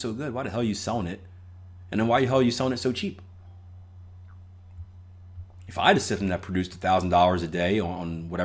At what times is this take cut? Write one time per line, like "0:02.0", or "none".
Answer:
none